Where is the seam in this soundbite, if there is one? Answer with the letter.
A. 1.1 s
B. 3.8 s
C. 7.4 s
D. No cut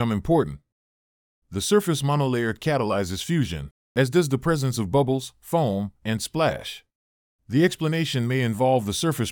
C